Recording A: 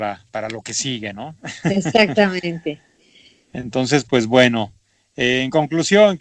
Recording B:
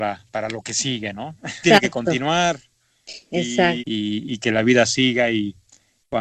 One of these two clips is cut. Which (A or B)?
B